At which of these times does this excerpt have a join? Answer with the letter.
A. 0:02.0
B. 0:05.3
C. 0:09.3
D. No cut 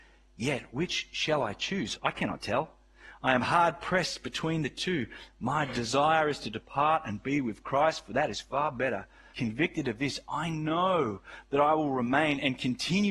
C